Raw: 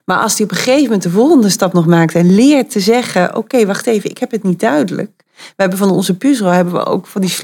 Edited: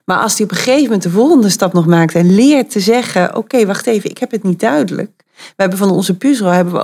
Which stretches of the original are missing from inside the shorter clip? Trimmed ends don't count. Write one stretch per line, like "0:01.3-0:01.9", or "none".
none